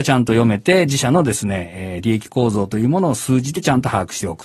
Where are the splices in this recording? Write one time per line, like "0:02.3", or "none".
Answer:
none